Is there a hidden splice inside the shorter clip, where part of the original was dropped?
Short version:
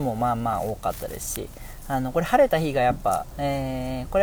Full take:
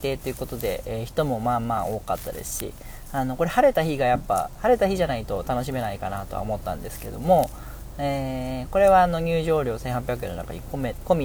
yes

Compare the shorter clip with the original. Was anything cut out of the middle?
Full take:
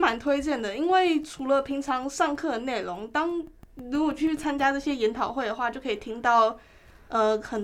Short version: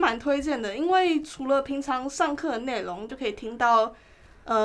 yes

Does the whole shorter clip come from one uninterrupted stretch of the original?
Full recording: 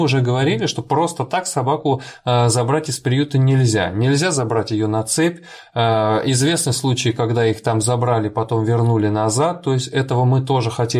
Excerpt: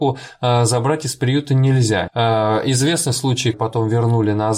no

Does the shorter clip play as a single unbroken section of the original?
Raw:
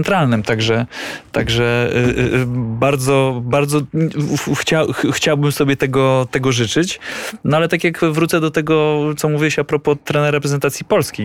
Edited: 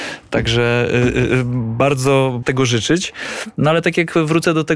no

